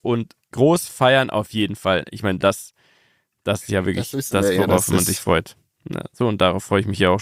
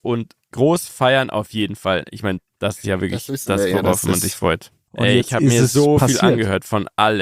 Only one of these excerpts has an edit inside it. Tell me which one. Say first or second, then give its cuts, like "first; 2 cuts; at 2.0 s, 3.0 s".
second; 2 cuts; at 2.4 s, 4.9 s